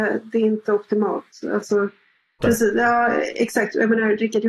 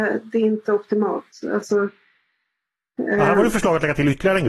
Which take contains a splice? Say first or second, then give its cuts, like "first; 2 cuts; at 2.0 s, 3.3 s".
first; 1 cut; at 2.4 s